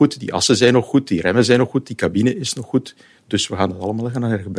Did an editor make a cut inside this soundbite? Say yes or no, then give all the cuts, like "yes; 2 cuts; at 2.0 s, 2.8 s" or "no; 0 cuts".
no; 0 cuts